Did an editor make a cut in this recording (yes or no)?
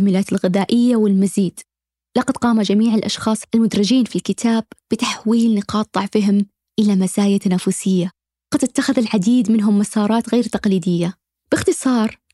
no